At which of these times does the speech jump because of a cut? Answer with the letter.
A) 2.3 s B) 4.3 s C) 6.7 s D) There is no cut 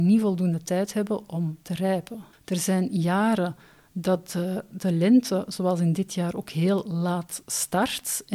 A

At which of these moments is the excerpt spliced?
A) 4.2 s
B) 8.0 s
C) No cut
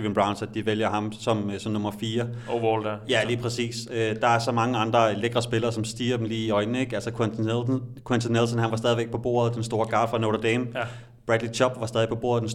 C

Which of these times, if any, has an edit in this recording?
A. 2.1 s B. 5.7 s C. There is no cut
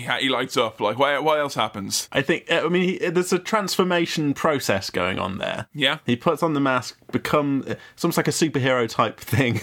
A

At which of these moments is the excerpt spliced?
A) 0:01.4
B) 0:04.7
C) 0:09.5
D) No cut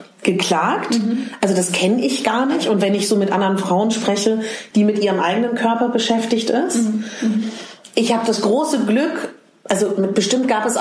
B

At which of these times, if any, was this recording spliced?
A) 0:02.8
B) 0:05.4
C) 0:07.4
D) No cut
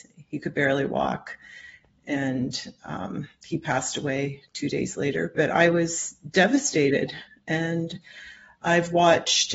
B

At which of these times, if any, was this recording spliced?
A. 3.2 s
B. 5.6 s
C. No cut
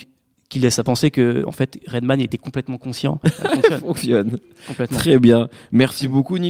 A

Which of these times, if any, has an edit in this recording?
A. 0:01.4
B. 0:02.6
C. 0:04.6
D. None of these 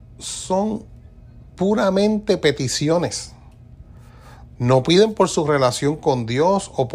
C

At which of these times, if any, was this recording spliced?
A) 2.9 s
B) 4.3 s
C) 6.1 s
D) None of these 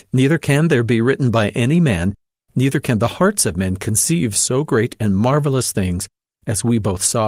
D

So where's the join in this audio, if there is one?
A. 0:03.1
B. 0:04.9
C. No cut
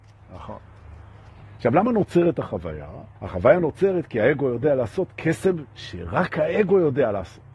A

